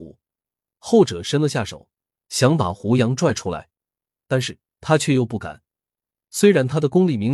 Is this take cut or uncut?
uncut